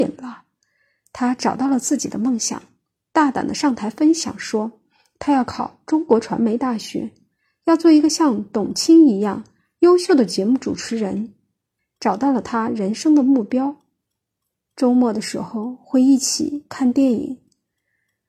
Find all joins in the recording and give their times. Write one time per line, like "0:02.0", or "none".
0:11.8
0:14.5